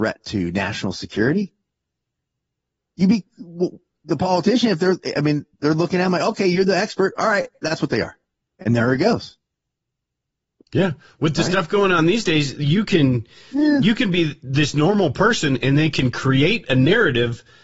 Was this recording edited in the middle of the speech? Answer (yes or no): no